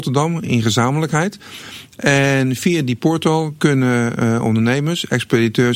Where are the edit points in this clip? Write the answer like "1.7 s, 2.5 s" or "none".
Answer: none